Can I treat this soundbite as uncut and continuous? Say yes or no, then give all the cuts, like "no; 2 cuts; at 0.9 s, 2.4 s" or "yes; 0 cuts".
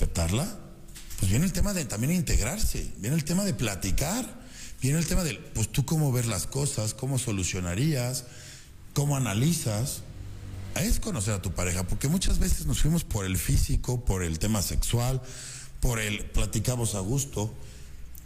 yes; 0 cuts